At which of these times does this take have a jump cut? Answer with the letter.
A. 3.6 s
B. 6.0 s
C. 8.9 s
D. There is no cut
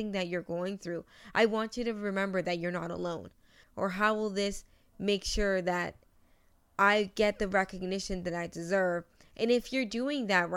A